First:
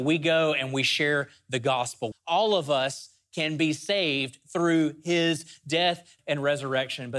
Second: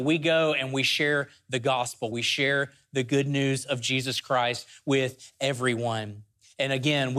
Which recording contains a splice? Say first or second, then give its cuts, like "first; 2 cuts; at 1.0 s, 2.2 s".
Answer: first; 2 cuts; at 2.1 s, 6.2 s